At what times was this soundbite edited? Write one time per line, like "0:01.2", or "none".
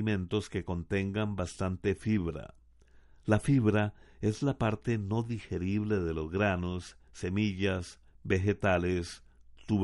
0:08.1